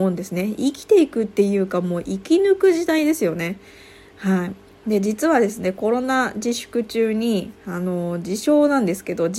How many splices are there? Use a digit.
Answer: 0